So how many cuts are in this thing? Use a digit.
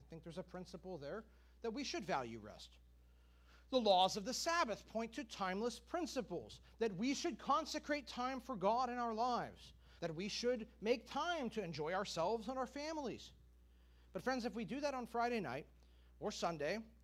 1